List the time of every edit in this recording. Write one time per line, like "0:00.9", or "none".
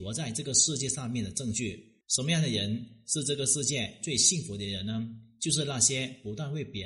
0:02.0